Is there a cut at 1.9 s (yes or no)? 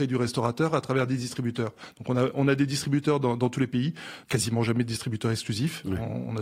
no